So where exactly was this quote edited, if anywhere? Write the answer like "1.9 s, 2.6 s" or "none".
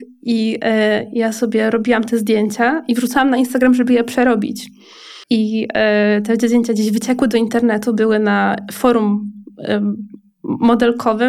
5.2 s